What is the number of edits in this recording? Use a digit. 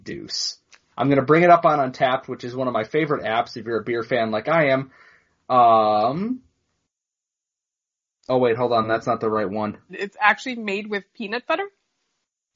2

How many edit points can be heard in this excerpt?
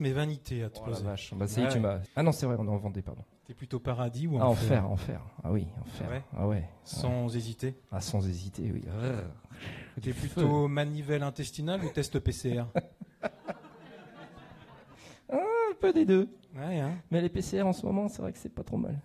1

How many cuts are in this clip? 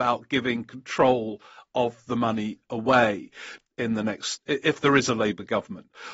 1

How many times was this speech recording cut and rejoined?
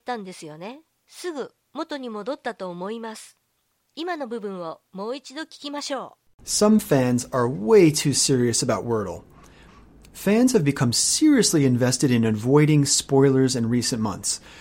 1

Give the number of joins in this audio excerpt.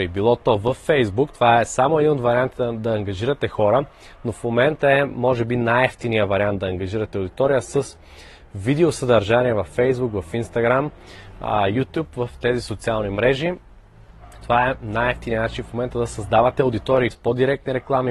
1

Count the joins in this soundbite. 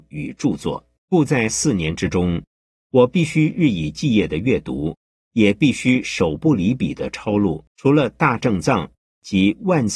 2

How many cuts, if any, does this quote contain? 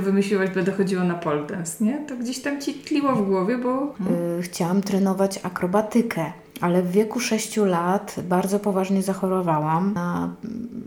1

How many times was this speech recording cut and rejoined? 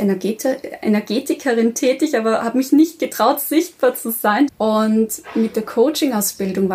1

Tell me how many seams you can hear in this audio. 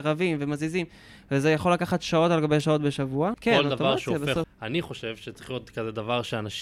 2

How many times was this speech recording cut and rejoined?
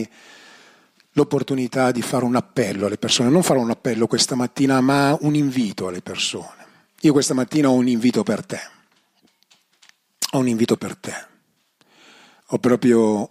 1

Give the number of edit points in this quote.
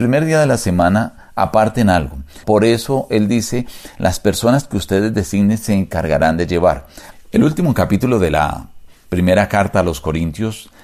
2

